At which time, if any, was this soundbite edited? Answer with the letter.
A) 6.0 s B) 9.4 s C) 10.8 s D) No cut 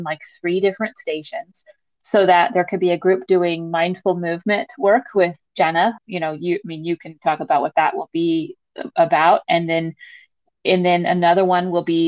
A